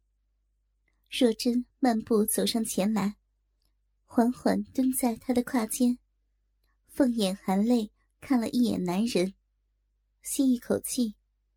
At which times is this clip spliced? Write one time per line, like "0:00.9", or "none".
none